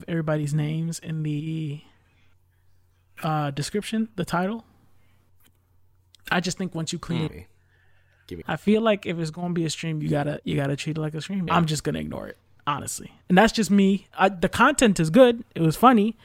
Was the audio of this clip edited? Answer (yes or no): yes